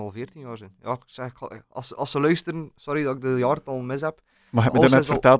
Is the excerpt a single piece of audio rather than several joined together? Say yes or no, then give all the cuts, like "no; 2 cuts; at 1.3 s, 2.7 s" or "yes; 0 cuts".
yes; 0 cuts